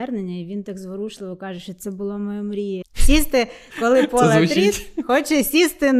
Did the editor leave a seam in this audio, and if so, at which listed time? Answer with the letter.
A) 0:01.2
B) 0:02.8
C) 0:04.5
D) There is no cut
B